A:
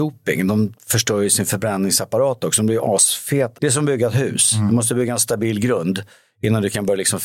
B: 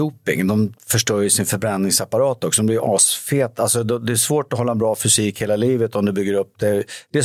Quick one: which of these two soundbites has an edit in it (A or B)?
A